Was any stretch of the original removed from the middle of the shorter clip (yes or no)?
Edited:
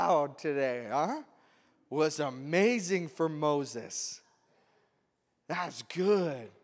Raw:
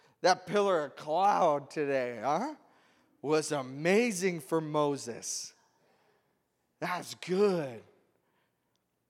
no